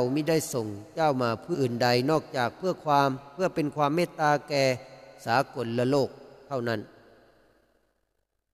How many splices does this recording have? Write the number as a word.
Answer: one